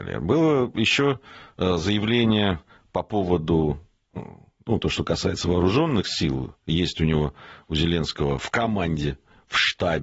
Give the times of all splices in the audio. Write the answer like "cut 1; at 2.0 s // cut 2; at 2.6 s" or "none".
none